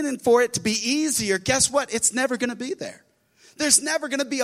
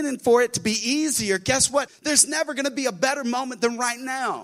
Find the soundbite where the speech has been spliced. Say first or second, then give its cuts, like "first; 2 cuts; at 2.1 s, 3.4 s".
second; 1 cut; at 1.9 s